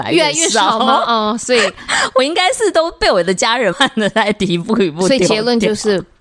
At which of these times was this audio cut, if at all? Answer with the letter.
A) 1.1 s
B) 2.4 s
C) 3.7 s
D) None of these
C